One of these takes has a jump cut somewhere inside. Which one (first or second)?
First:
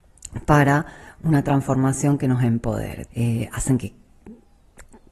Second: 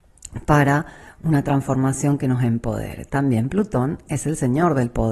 first